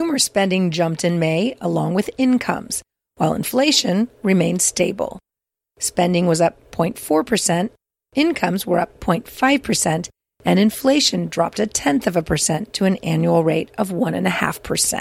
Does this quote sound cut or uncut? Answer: uncut